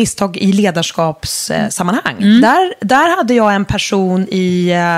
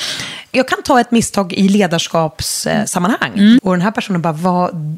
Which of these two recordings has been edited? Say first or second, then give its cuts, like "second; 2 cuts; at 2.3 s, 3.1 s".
second; 1 cut; at 3.6 s